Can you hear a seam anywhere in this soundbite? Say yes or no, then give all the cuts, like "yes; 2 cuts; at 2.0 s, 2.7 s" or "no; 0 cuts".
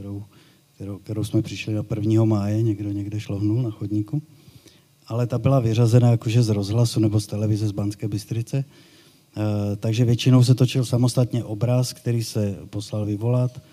no; 0 cuts